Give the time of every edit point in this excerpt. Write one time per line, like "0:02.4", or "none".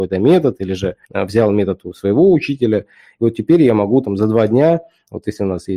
0:01.0